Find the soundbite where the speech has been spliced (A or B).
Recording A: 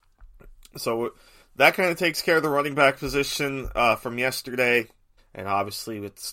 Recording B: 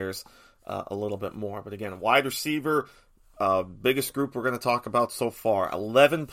A